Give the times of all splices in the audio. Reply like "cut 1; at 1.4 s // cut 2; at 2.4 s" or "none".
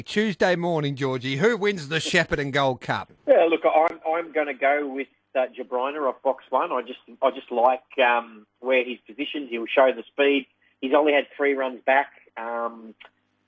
cut 1; at 3.2 s